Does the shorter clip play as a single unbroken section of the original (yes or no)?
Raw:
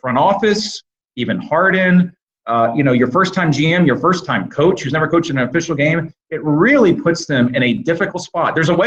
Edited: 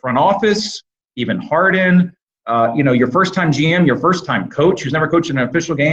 yes